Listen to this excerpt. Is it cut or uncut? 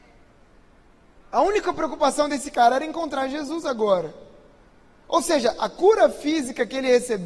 uncut